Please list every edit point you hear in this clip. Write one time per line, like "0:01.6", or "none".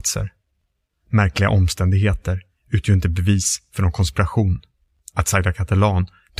none